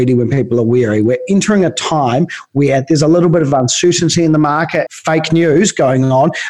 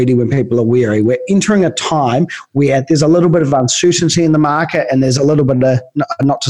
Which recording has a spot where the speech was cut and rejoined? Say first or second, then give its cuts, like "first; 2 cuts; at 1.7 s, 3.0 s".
first; 1 cut; at 4.9 s